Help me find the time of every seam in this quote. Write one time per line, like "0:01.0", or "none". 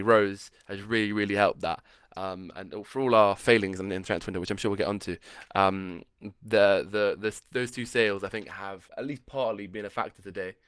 0:08.9